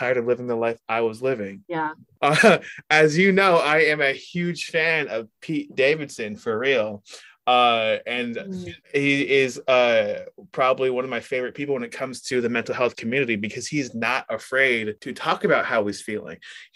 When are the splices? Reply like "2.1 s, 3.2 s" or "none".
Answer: 2.2 s

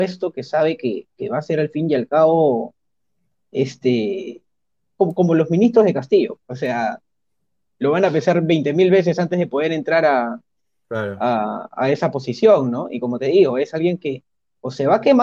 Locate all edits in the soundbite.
6.4 s

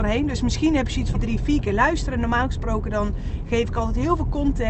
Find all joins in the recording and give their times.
1.1 s

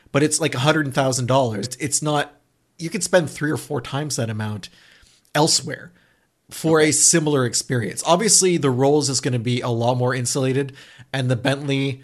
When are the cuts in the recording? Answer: 1.6 s

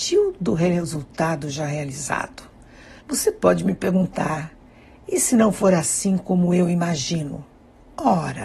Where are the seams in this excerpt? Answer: 3.0 s

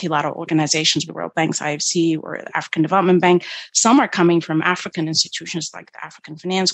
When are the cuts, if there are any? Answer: 1.1 s

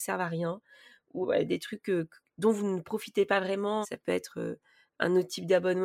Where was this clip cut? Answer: 1.2 s, 3.8 s

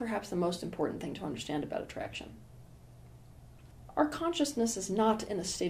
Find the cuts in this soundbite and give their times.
none

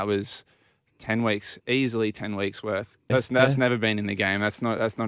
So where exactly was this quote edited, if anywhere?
1.6 s, 3.1 s

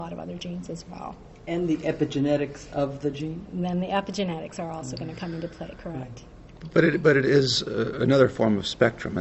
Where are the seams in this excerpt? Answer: none

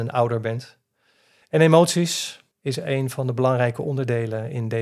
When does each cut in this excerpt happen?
1.4 s, 2.5 s

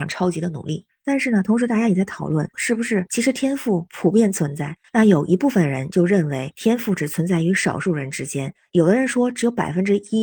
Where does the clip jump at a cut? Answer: 4.8 s

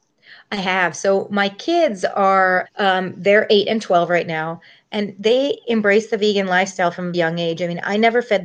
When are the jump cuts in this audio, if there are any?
2.6 s, 7.1 s

